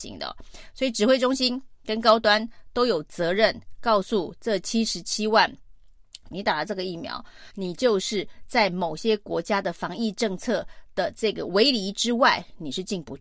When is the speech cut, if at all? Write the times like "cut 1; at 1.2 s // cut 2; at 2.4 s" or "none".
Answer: cut 1; at 6.3 s // cut 2; at 7.5 s